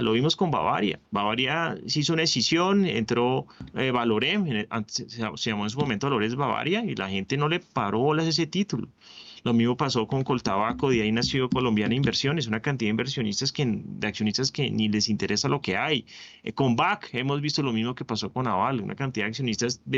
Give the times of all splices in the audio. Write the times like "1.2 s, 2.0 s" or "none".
1.1 s